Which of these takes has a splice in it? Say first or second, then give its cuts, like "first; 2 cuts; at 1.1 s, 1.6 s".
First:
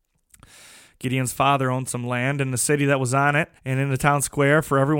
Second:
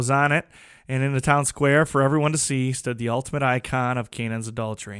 first; 1 cut; at 3.6 s